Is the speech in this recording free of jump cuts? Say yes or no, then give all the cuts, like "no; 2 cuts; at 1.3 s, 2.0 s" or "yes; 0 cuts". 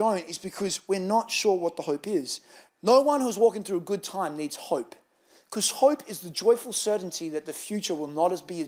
no; 1 cut; at 2.7 s